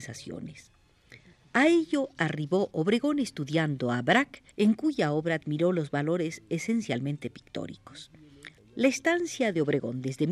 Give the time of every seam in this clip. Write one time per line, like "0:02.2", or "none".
0:04.5
0:08.6